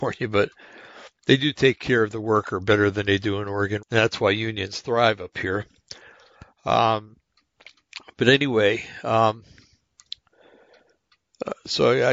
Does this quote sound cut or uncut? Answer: cut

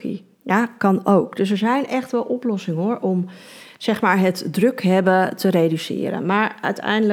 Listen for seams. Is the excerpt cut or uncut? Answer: uncut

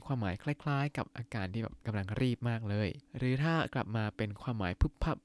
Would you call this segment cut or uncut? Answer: cut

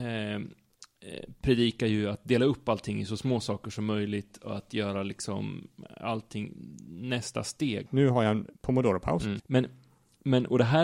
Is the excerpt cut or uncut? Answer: cut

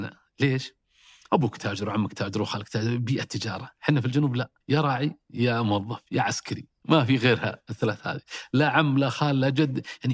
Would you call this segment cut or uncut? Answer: cut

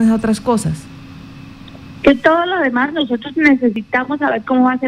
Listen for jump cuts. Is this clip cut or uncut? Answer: uncut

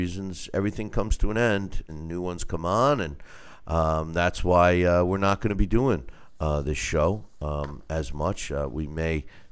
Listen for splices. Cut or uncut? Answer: cut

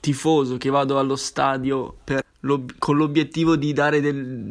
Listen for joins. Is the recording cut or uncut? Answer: cut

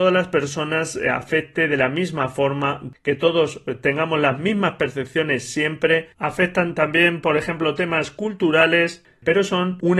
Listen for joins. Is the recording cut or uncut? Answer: uncut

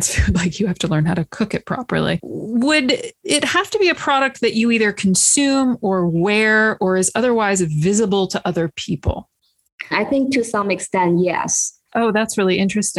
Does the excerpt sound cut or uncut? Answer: cut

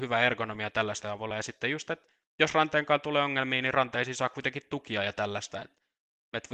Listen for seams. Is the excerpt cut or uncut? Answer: uncut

